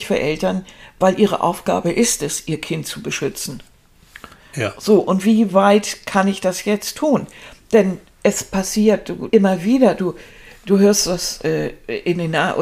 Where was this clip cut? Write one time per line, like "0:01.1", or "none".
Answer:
0:09.3